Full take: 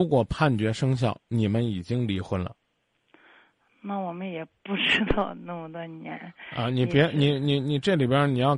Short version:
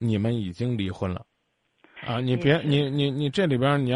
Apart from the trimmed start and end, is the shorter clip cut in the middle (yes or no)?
yes